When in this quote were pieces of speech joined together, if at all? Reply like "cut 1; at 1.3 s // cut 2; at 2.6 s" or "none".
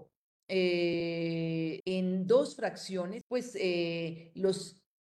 cut 1; at 1.8 s // cut 2; at 3.2 s